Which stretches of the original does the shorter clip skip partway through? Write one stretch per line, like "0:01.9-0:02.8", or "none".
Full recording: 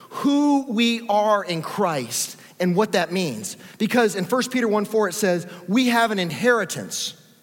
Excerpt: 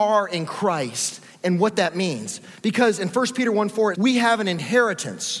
0:05.1-0:05.7